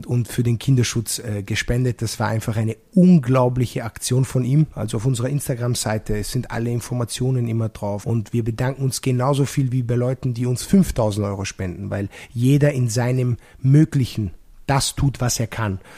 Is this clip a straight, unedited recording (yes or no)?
no